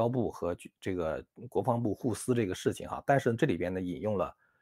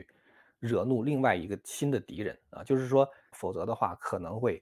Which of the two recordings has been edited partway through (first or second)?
second